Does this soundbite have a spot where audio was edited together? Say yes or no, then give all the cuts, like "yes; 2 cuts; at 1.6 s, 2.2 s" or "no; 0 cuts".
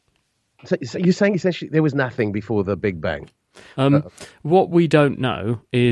yes; 1 cut; at 3.7 s